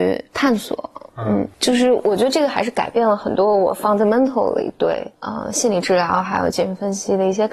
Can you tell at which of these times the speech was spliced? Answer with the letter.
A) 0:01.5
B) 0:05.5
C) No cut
C